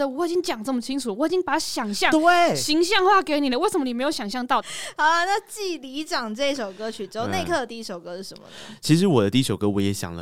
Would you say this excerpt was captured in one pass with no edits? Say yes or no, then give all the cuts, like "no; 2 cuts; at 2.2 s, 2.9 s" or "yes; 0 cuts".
yes; 0 cuts